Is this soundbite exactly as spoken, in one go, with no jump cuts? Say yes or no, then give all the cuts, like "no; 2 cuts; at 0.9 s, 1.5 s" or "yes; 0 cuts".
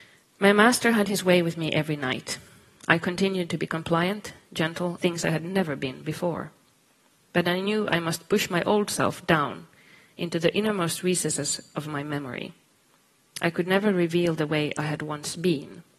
no; 1 cut; at 5.0 s